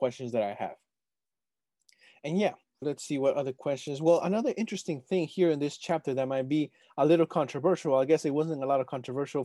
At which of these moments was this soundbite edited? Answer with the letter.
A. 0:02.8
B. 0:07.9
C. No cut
A